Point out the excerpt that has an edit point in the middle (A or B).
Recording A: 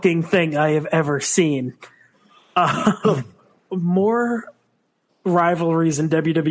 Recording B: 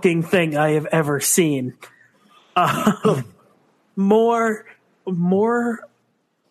A